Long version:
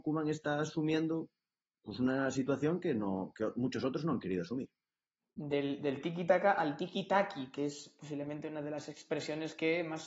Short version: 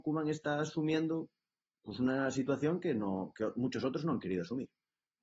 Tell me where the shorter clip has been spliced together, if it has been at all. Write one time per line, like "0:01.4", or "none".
none

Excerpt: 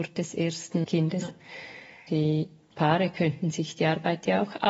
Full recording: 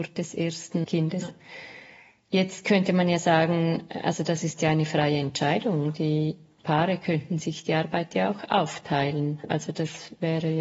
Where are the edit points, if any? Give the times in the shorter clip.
0:02.1

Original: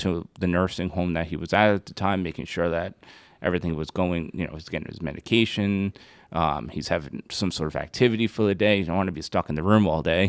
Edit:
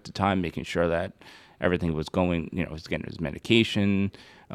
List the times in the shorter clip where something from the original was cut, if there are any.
none

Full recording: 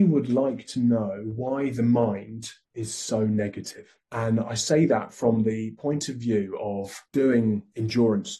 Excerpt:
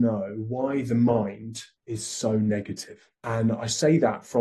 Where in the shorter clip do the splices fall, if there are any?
none

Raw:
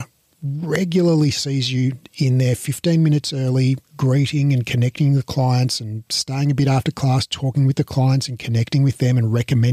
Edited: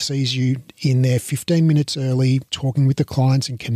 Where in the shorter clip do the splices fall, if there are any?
0:02.5

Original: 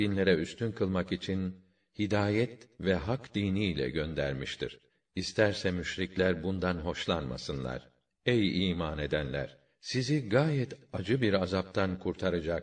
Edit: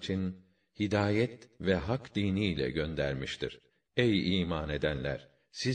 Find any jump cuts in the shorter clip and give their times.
0:03.9

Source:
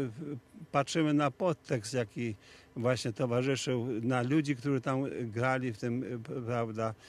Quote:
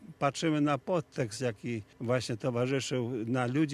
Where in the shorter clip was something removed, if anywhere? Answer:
0:01.9

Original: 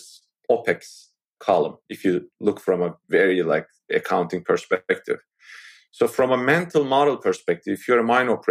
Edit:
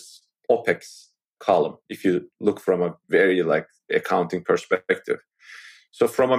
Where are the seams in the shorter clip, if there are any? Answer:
none

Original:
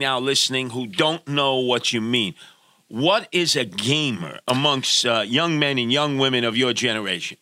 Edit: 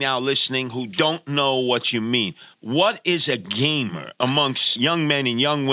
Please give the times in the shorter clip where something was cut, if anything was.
0:02.5
0:04.8

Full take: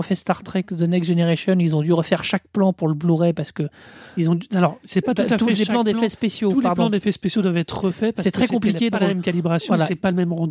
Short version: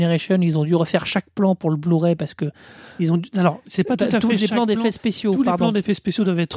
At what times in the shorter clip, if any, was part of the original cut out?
none

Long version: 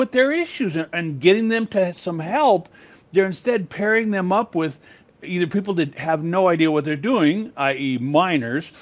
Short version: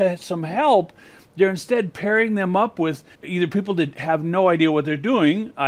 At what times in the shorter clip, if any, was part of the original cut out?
0:03.1

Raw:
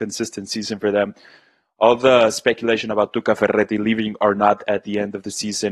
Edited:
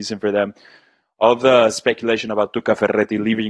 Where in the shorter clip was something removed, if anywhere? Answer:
none

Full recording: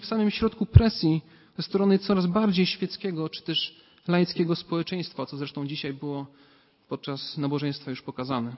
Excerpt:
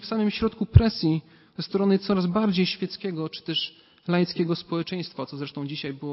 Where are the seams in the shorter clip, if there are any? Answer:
none

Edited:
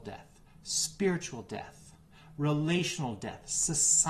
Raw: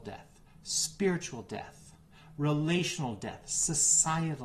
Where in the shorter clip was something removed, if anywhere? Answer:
none

